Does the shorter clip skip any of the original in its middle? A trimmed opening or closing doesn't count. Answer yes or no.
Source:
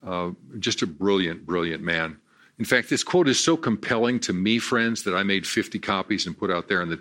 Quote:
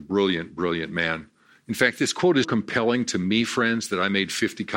yes